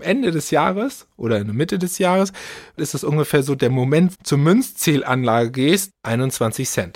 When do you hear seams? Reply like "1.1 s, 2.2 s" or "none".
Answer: 2.8 s, 4.1 s, 5.9 s